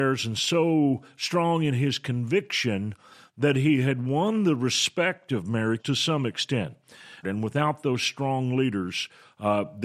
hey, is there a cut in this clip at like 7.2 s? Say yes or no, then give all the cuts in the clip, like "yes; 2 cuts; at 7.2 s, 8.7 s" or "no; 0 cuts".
yes; 2 cuts; at 5.8 s, 7.2 s